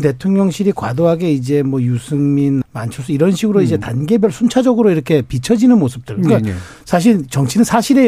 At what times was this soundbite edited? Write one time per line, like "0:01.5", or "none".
0:02.6